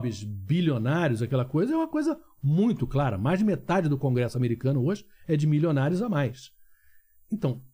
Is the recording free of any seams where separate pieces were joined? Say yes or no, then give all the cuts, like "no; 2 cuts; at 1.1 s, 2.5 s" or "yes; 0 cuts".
yes; 0 cuts